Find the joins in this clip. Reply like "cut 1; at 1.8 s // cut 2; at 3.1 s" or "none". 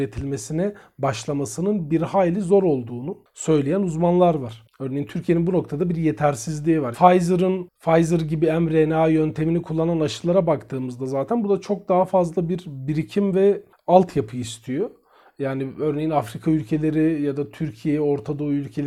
cut 1; at 6.9 s